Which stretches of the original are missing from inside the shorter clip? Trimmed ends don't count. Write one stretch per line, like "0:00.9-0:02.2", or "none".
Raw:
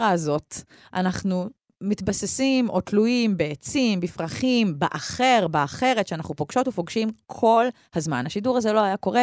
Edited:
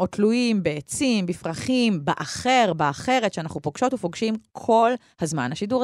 none